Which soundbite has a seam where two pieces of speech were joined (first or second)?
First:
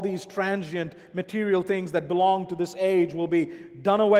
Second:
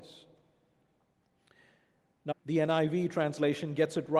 second